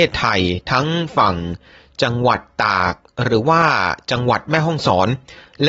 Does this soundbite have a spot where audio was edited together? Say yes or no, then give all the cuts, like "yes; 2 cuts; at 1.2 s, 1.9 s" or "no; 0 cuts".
no; 0 cuts